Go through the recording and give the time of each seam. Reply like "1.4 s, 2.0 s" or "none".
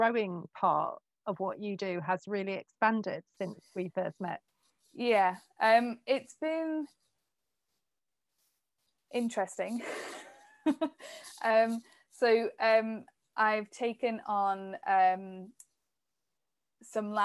none

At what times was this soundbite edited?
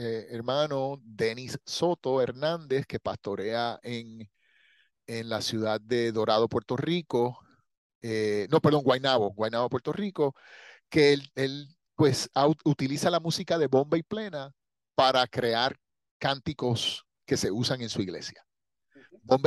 none

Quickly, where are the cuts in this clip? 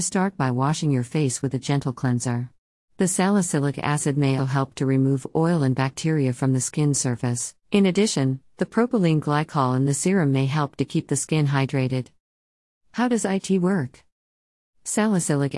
2.9 s, 4.4 s, 7.6 s

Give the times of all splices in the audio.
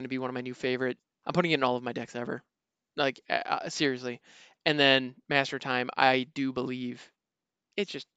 1.2 s

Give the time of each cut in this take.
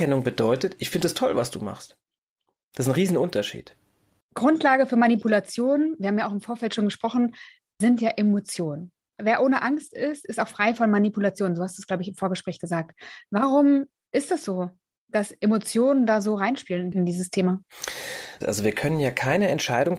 18.4 s

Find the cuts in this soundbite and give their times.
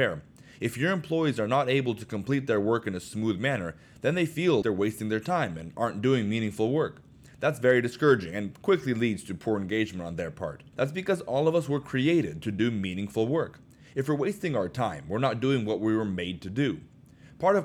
4.6 s, 10.7 s

